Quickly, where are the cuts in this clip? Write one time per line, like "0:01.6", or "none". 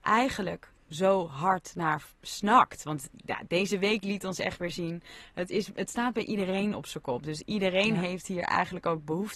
none